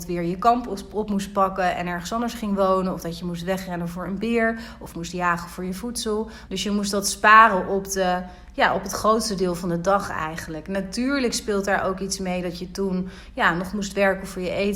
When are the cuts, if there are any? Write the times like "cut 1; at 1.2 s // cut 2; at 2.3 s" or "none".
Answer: cut 1; at 6.5 s